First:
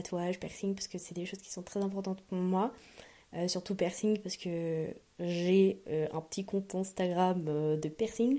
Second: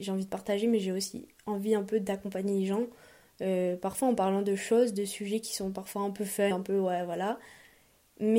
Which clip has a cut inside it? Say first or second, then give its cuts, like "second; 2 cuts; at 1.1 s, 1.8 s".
second; 1 cut; at 6.5 s